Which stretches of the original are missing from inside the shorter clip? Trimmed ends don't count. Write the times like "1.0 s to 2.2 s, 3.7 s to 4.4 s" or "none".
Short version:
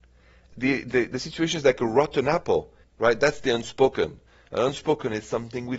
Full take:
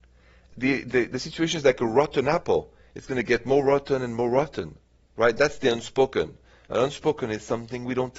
2.8 s to 5.0 s